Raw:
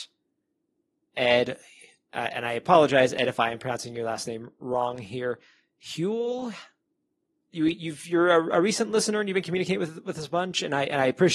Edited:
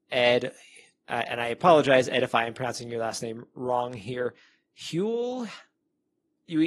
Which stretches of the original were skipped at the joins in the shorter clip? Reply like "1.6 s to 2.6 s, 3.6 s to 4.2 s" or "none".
none